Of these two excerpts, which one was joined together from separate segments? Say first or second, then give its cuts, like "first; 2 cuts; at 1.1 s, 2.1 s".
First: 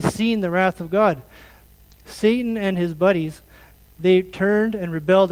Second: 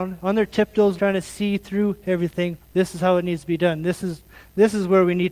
second; 2 cuts; at 1.0 s, 2.6 s